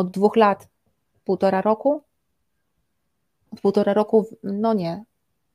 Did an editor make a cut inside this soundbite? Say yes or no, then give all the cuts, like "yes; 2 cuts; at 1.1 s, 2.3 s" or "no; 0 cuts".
no; 0 cuts